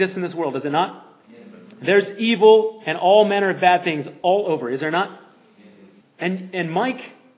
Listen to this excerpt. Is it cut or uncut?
cut